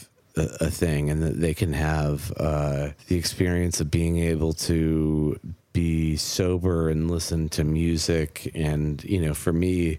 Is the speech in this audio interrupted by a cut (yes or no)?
no